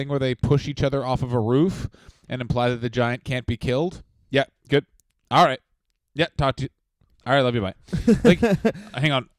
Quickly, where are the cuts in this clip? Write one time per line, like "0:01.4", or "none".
none